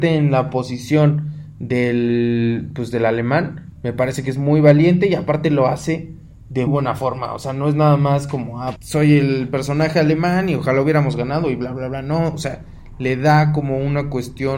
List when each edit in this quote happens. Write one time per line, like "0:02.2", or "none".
0:06.7
0:08.8